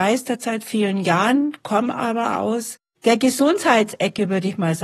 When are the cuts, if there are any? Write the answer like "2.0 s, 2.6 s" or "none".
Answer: none